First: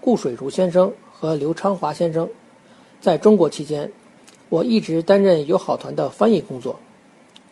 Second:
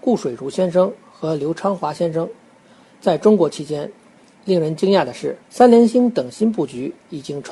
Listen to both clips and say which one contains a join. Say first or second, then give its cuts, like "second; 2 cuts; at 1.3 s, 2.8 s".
second; 2 cuts; at 4.3 s, 5.4 s